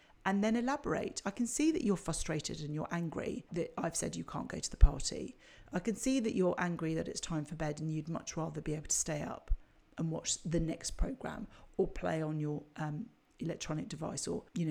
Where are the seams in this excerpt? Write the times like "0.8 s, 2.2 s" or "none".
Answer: none